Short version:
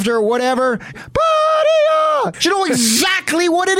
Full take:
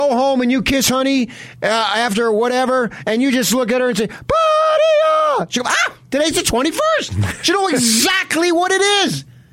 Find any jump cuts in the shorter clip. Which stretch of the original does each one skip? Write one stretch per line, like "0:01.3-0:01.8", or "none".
0:03.0-0:04.1
0:05.5-0:07.4